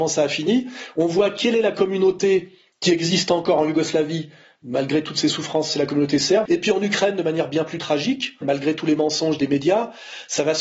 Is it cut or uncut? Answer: cut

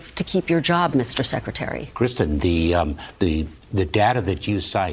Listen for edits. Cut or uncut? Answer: uncut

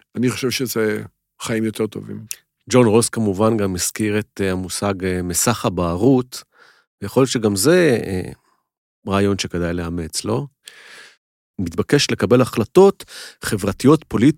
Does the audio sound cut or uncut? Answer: cut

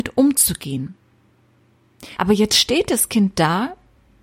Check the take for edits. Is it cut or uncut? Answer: cut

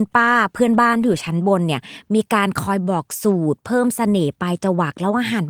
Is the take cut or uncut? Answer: uncut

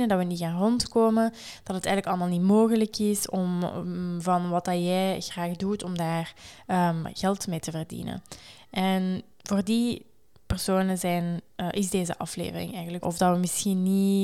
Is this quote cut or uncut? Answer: cut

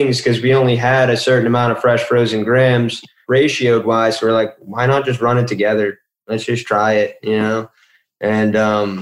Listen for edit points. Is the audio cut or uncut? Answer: uncut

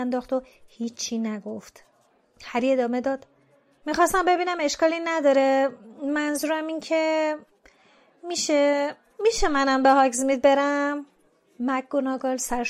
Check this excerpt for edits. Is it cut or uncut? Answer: uncut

